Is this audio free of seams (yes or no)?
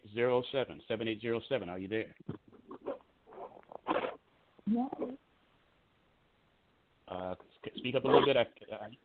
yes